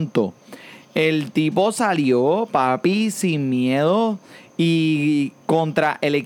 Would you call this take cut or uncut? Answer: uncut